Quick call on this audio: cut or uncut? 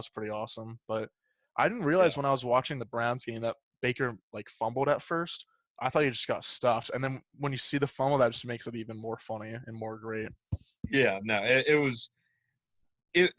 uncut